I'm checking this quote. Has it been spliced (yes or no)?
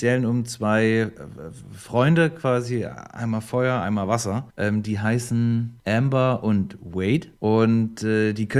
no